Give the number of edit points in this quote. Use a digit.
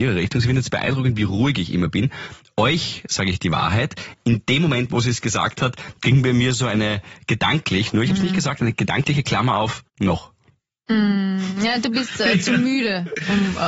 1